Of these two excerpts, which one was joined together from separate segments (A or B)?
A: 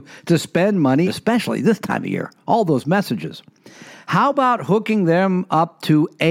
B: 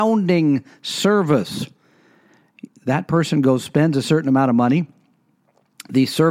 A